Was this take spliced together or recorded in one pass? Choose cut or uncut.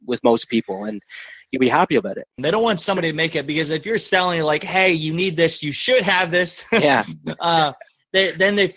cut